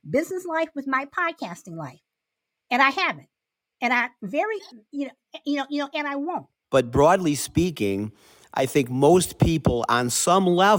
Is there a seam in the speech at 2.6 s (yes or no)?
no